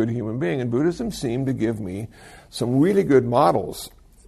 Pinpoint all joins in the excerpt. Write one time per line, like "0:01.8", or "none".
none